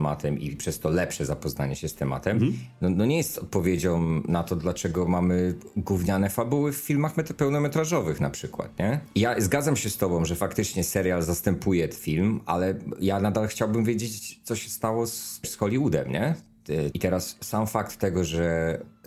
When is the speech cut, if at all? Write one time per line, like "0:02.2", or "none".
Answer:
0:16.9